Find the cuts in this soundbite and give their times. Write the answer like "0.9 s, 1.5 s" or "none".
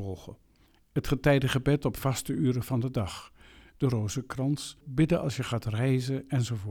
3.7 s, 4.8 s